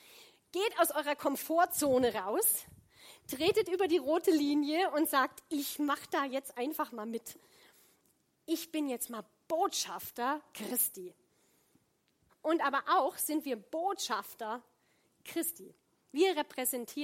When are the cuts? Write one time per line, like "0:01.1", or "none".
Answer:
0:12.3